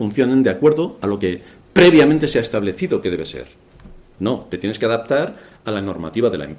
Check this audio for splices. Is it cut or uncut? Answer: cut